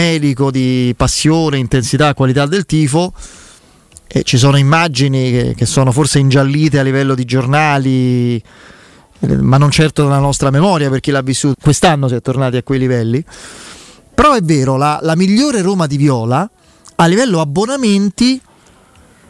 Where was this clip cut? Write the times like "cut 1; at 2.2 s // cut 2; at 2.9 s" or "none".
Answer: cut 1; at 11.5 s